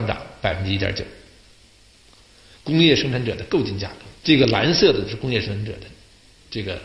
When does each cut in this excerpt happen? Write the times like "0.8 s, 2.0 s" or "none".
2.6 s, 4.2 s